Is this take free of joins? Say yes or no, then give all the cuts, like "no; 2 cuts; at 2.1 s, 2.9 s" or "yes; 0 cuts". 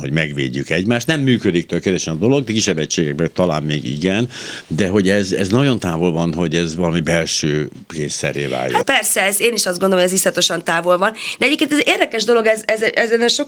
no; 1 cut; at 8.8 s